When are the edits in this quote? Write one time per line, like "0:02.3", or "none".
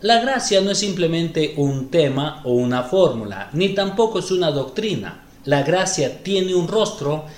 0:05.3